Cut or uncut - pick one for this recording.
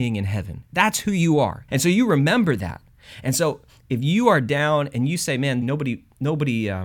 cut